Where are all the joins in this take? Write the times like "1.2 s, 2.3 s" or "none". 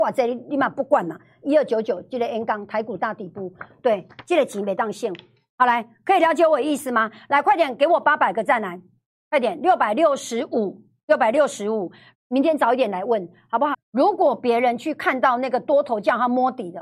12.1 s, 13.7 s